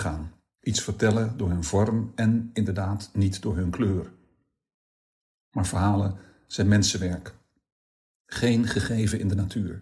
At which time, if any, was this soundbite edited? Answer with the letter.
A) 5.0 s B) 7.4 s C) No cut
C